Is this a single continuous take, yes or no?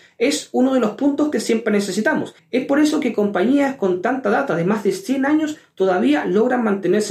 no